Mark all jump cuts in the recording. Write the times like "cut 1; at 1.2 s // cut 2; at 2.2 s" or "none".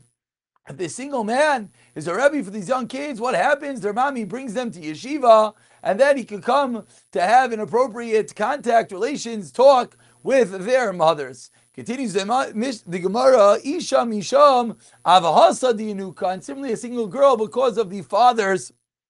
none